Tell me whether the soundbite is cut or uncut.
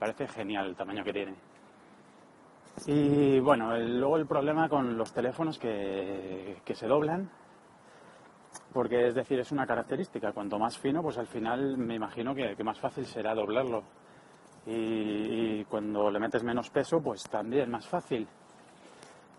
cut